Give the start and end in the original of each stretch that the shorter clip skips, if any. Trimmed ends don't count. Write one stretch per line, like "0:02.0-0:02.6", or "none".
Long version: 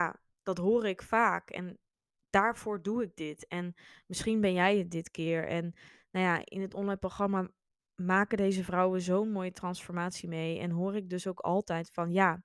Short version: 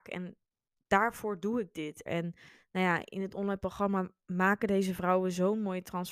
0:03.5-0:05.5
0:07.6-0:07.9